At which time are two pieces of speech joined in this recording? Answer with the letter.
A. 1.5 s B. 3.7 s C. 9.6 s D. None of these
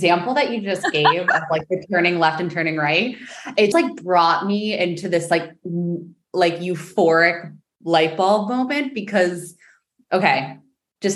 B